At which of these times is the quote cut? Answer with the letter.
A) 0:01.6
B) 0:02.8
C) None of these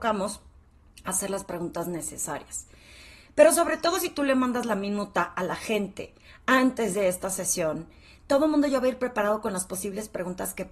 C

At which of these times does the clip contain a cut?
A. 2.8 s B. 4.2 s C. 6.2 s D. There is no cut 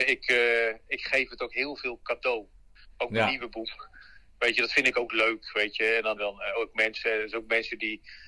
C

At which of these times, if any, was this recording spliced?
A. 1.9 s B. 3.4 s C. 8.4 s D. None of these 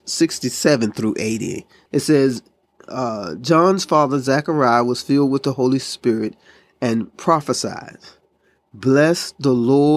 A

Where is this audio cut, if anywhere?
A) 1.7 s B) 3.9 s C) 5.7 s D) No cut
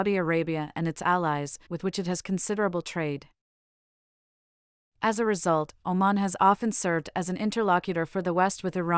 A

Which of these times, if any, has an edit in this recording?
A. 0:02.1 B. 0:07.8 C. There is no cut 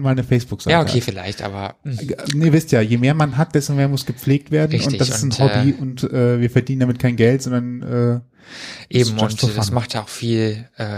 C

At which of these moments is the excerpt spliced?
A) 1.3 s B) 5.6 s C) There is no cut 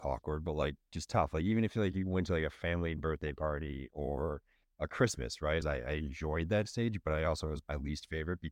B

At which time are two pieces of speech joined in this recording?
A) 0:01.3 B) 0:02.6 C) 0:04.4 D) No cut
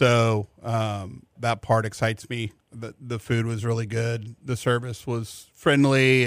A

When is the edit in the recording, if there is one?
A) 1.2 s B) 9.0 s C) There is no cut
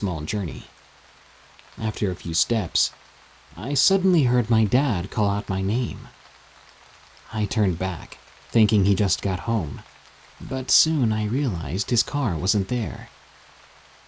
C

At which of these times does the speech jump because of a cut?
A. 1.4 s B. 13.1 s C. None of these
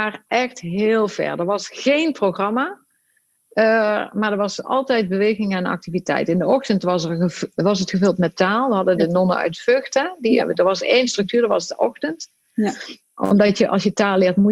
C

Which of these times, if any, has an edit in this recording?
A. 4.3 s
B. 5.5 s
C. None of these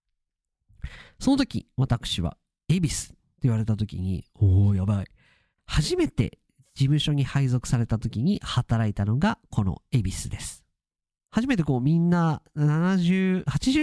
B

